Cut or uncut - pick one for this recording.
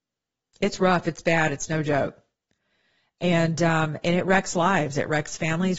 uncut